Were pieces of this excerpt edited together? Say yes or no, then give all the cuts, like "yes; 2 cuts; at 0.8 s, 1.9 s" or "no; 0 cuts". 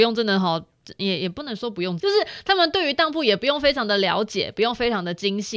yes; 1 cut; at 2.0 s